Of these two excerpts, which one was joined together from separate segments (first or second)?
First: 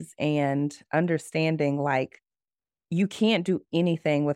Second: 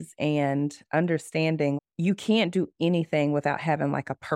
second